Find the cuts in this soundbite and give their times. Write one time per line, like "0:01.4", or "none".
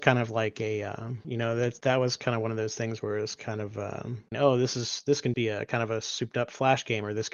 0:01.2
0:04.3
0:05.3